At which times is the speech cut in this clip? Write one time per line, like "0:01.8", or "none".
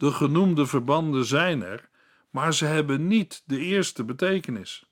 none